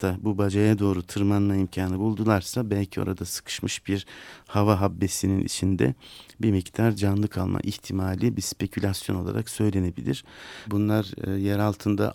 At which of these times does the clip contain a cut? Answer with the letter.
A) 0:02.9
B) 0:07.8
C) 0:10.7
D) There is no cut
C